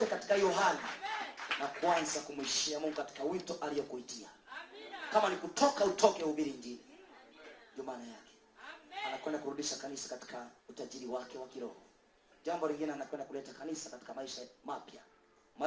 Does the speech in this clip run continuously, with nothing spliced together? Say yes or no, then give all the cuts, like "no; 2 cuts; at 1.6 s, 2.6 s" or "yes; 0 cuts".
no; 1 cut; at 10.6 s